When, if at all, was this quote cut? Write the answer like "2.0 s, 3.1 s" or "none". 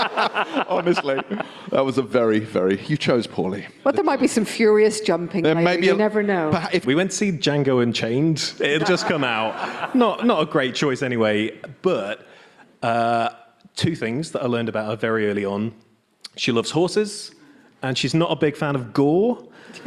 6.8 s, 8.8 s